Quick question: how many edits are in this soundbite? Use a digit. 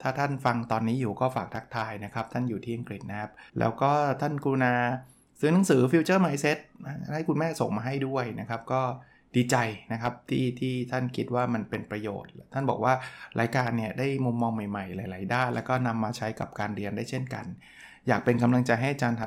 1